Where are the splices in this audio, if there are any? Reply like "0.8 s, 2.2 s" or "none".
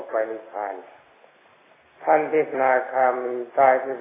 2.5 s